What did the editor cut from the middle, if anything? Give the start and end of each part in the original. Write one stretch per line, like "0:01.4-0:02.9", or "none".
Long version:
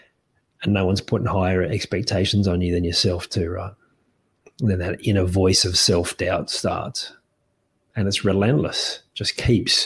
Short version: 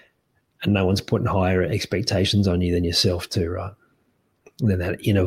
none